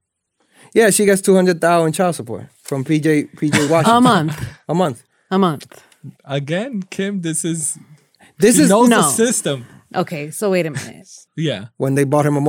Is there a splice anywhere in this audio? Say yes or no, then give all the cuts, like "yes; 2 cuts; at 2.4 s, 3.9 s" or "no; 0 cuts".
yes; 2 cuts; at 6.2 s, 11.3 s